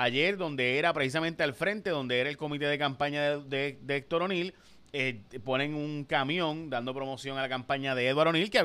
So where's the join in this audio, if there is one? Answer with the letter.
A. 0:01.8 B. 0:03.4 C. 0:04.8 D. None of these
D